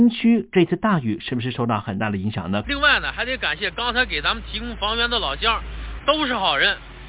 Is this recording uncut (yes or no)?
no